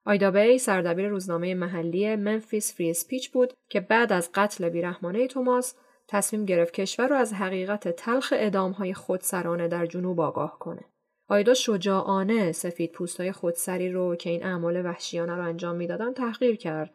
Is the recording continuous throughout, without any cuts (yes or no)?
yes